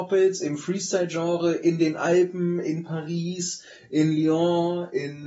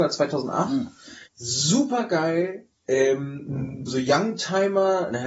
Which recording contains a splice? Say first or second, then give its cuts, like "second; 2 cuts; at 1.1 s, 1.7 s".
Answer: second; 2 cuts; at 1.3 s, 3.9 s